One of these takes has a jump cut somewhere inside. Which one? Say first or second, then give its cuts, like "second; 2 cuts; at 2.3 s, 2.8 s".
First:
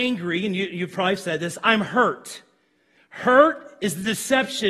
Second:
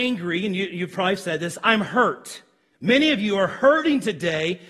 second; 1 cut; at 2.7 s